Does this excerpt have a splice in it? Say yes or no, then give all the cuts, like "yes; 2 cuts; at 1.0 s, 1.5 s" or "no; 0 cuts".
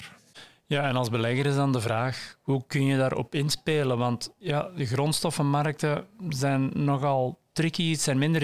no; 0 cuts